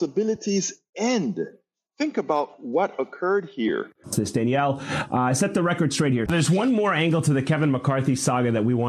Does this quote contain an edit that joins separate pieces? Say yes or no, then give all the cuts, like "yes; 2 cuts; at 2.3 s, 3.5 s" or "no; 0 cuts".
yes; 2 cuts; at 4.0 s, 6.3 s